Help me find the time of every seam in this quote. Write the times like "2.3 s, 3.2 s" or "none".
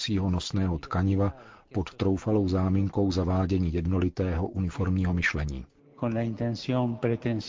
none